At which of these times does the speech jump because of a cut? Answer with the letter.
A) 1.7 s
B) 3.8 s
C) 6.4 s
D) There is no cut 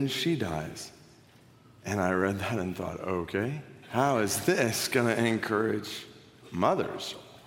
B